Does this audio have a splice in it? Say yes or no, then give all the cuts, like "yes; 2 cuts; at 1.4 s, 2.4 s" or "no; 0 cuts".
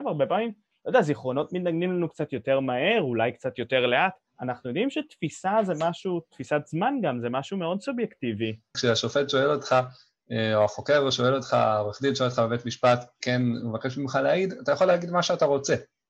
yes; 1 cut; at 8.7 s